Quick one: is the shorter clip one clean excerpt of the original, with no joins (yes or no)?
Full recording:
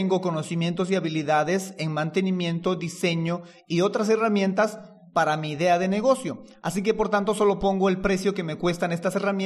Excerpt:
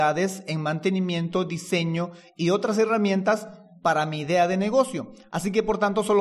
yes